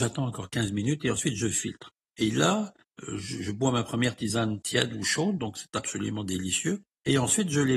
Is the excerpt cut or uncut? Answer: uncut